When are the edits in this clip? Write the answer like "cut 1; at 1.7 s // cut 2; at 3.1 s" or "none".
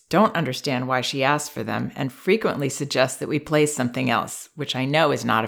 none